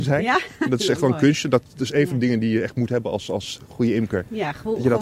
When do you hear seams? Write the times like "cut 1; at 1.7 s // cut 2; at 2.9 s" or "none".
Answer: none